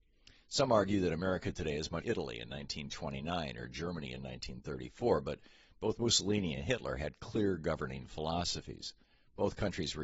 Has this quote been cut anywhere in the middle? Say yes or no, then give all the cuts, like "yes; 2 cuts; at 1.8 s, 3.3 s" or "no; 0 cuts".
yes; 1 cut; at 2.0 s